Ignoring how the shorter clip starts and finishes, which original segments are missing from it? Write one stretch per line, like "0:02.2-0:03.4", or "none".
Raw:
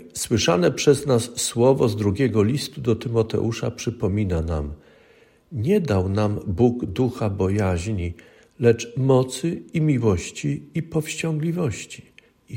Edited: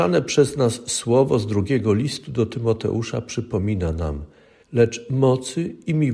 0:05.1-0:08.5